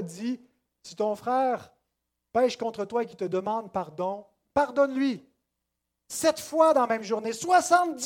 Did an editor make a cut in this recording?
no; 0 cuts

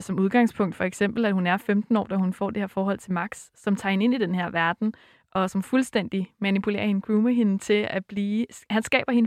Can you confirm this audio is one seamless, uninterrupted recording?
yes; 0 cuts

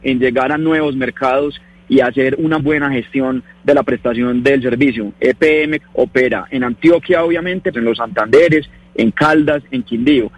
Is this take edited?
yes; 3 cuts; at 2.6 s, 5.8 s, 7.7 s

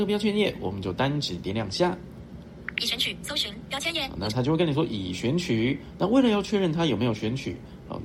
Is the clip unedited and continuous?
yes; 0 cuts

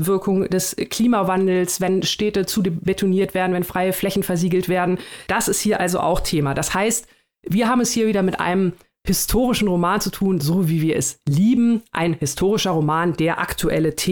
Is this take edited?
no; 0 cuts

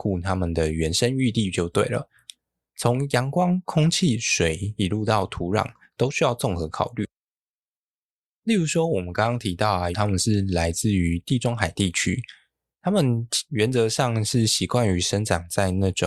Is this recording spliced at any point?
yes; 1 cut; at 9.9 s

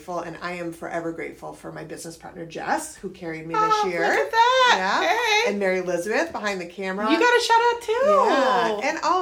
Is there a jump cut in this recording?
no; 0 cuts

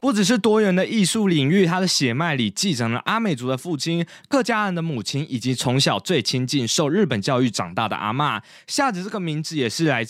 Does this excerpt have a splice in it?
no; 0 cuts

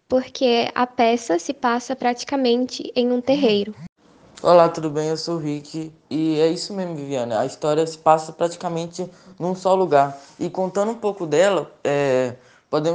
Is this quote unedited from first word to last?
yes; 0 cuts

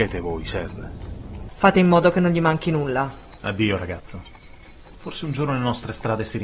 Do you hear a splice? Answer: yes; 2 cuts; at 1.5 s, 3.4 s

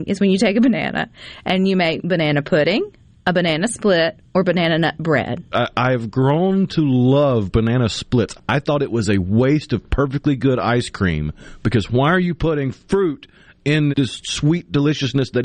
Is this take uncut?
no; 3 cuts; at 5.5 s, 8.4 s, 13.9 s

